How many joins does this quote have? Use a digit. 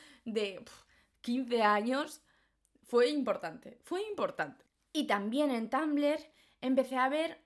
0